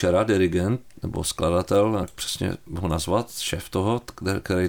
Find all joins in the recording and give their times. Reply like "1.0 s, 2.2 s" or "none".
2.0 s